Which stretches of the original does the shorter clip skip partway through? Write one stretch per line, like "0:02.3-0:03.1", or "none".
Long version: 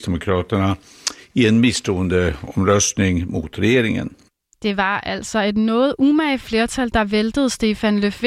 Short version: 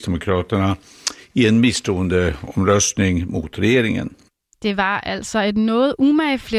none